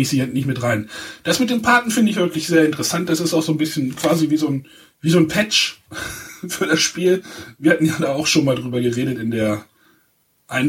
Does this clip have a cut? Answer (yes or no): no